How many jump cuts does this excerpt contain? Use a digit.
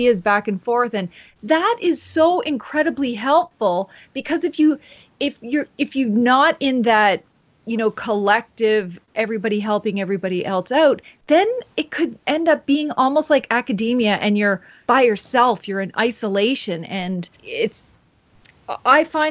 2